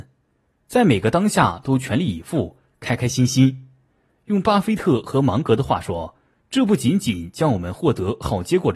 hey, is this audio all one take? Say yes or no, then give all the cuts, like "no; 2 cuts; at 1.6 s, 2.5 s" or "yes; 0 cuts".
yes; 0 cuts